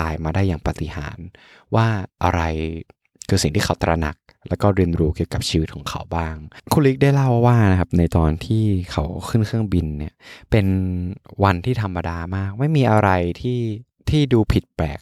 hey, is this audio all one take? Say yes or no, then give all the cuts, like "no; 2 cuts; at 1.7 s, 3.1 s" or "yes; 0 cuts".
yes; 0 cuts